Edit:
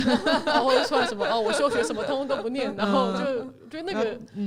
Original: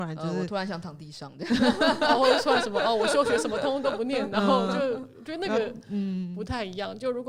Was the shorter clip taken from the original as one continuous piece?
yes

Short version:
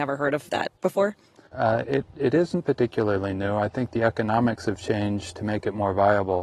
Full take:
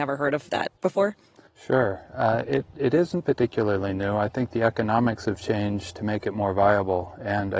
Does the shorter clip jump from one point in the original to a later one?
yes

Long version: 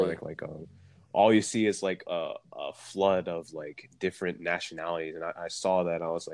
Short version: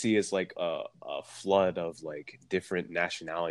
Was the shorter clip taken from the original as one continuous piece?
yes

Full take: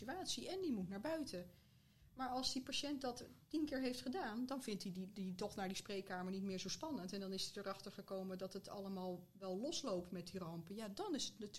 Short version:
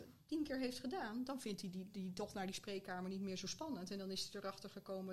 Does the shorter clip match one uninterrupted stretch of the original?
yes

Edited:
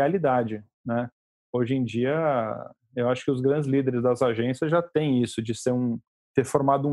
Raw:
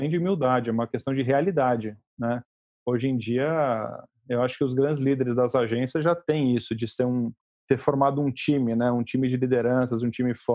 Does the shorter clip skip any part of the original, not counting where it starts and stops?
no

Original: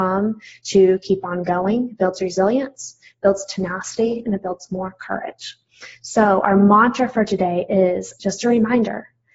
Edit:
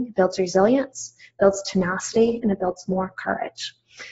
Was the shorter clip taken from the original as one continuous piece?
yes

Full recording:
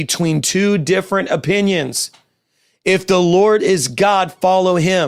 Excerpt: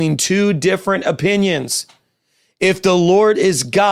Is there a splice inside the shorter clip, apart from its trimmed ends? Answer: no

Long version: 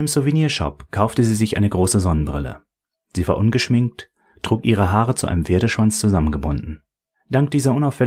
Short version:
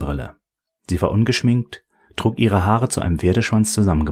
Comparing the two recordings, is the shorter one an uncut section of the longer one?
yes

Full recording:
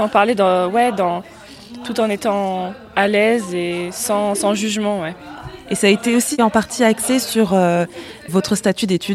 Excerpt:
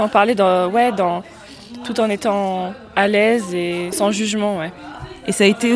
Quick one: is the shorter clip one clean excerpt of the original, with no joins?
no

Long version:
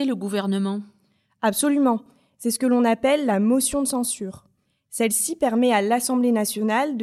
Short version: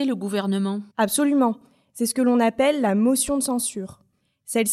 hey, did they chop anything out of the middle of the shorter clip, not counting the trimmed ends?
yes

